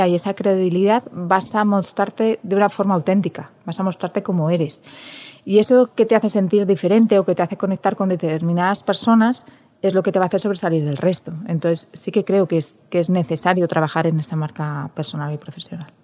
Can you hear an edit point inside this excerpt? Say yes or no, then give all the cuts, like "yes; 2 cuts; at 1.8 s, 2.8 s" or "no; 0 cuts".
no; 0 cuts